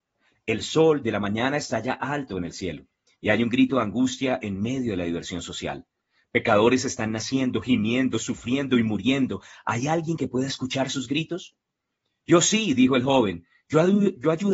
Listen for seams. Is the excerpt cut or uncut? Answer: uncut